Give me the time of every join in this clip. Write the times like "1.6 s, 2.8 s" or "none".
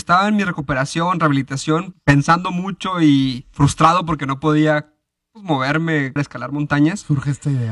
1.9 s, 6.2 s